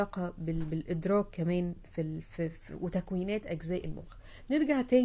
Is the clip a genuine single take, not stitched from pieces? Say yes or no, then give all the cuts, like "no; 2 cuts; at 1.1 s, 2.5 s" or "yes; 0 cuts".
yes; 0 cuts